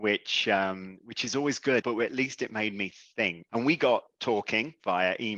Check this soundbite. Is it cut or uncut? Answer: cut